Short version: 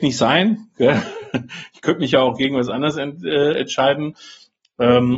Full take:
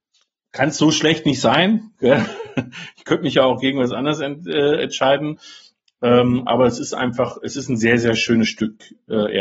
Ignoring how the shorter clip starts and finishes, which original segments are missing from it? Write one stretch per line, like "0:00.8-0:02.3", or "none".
none